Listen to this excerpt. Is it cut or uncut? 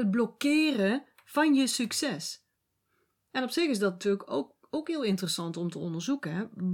uncut